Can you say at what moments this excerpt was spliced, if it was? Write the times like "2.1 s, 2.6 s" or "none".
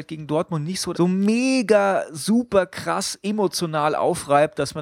0.9 s